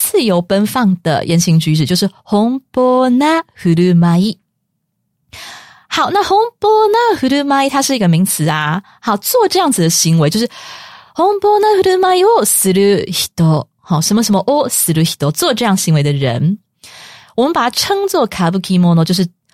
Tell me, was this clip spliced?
no; 0 cuts

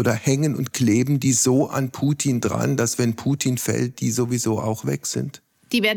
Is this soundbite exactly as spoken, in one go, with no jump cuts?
yes; 0 cuts

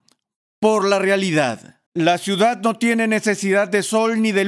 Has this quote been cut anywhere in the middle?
yes; 1 cut; at 1.9 s

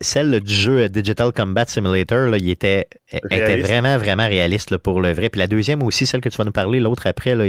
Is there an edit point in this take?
no; 0 cuts

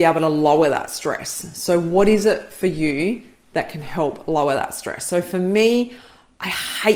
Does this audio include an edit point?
no; 0 cuts

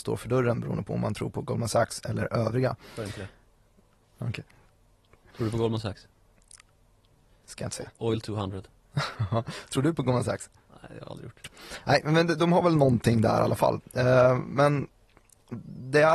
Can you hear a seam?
no; 0 cuts

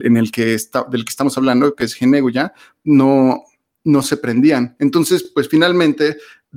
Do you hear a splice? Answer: no; 0 cuts

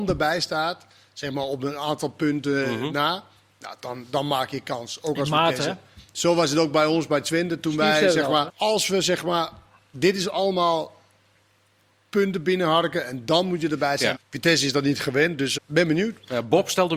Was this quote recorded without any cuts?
no; 3 cuts; at 8.5 s, 14.2 s, 15.6 s

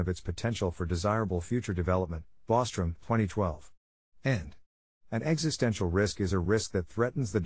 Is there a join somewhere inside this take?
no; 0 cuts

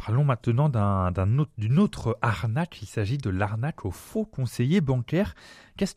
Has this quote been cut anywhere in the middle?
no; 0 cuts

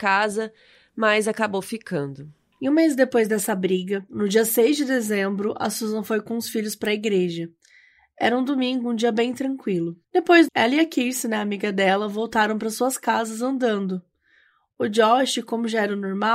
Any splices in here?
yes; 1 cut; at 10.5 s

